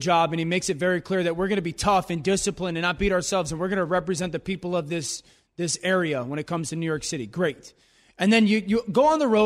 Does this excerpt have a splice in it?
no; 0 cuts

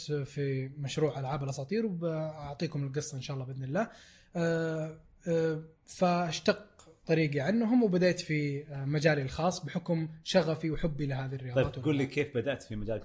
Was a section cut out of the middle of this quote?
no; 0 cuts

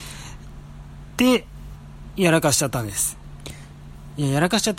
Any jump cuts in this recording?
no; 0 cuts

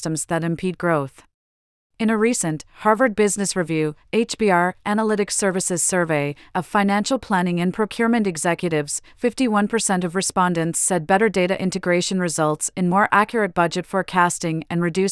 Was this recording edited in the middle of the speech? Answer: yes; 1 cut; at 1.9 s

